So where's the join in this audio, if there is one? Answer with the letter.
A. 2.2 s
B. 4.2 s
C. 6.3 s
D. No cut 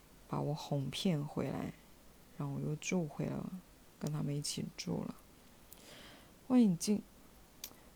C